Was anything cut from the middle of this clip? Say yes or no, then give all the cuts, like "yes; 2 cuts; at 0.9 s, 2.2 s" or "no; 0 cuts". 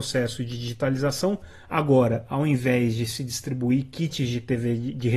no; 0 cuts